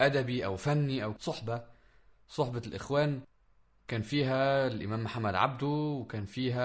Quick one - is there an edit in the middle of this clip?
no; 0 cuts

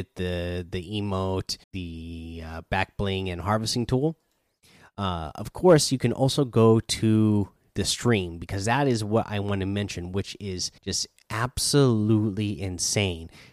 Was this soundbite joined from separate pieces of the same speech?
yes; 2 cuts; at 1.6 s, 10.8 s

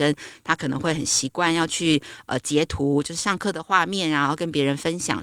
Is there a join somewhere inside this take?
no; 0 cuts

